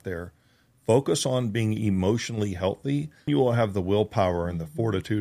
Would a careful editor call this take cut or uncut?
cut